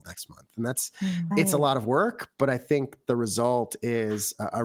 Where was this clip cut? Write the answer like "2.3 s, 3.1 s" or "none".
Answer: 1.3 s